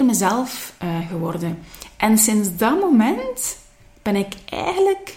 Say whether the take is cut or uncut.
uncut